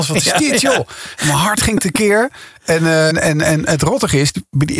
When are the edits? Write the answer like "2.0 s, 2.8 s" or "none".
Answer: 3.1 s